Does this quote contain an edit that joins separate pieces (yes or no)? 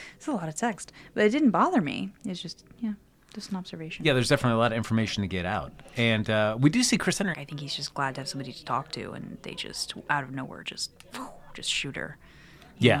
yes